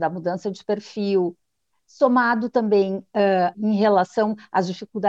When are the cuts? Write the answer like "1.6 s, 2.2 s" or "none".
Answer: 3.5 s